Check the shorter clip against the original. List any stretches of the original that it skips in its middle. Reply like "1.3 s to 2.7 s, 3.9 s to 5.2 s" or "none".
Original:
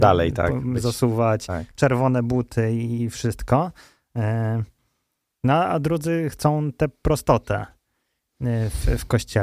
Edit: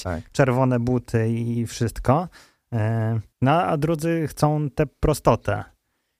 4.7 s to 5.3 s